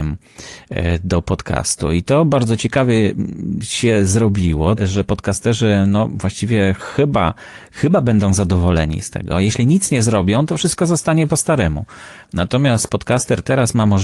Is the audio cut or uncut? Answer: cut